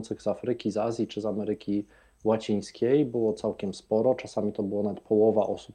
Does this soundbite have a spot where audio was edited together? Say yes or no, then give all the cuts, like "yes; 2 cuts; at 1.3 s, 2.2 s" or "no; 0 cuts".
no; 0 cuts